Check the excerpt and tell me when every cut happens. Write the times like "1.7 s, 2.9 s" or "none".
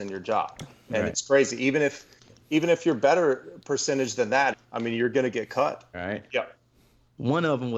4.5 s, 5.9 s